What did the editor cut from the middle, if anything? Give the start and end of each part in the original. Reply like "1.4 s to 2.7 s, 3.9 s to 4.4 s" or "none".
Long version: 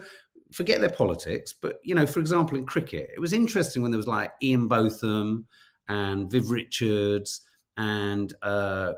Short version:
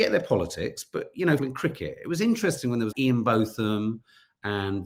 2.1 s to 2.5 s, 4.0 s to 4.4 s